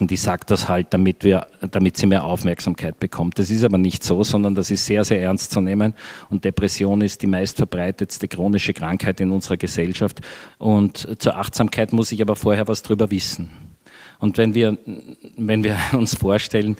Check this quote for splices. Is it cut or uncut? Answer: cut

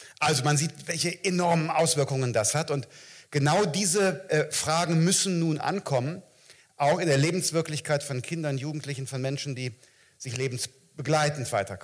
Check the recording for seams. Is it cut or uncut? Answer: uncut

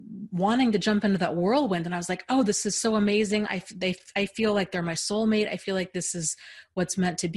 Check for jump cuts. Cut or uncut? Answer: uncut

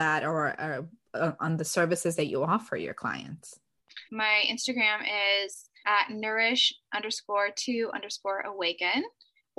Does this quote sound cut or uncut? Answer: cut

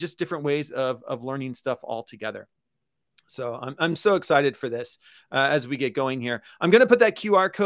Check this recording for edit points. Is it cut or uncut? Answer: uncut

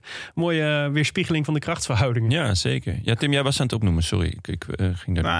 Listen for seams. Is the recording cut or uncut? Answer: uncut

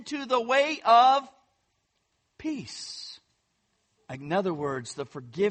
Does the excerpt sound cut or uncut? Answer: cut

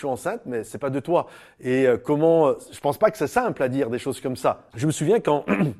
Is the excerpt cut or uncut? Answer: cut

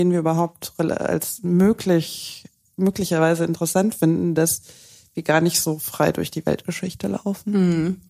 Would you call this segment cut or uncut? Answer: uncut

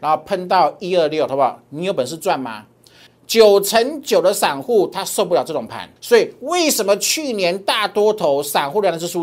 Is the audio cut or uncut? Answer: cut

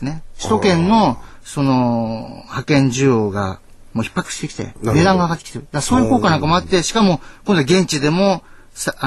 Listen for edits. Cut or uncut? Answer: uncut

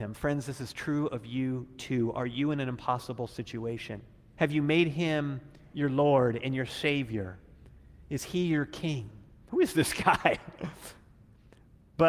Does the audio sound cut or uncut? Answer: cut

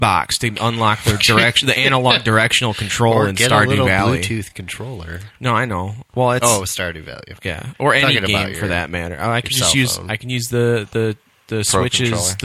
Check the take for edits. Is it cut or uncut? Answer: uncut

